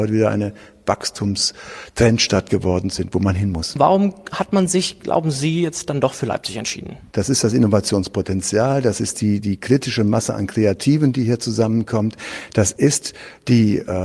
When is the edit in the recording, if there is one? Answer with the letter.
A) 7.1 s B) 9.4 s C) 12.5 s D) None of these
A